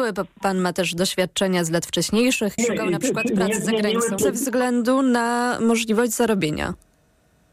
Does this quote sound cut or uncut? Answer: cut